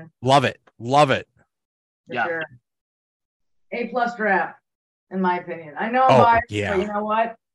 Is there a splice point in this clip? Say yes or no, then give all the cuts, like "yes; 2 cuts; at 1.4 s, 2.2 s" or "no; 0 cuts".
no; 0 cuts